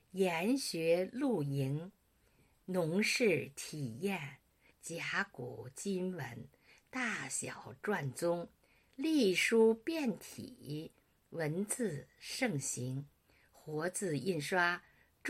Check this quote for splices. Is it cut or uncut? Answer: cut